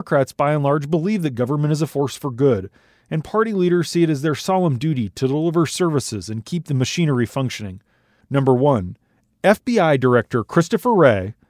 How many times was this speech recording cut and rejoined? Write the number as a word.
one